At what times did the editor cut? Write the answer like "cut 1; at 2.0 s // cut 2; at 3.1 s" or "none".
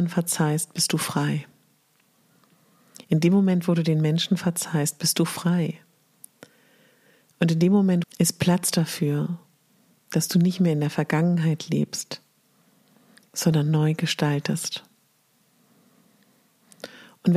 cut 1; at 8.0 s